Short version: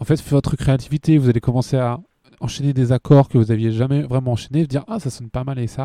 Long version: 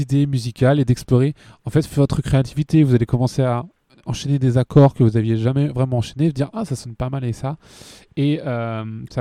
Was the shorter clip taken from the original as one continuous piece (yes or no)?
yes